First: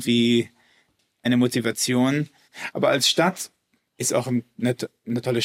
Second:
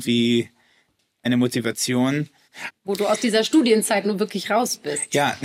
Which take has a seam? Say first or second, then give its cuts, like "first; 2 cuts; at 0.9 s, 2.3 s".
second; 1 cut; at 2.7 s